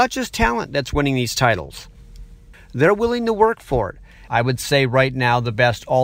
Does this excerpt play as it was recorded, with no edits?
no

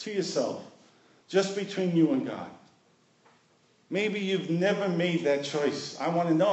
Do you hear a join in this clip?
no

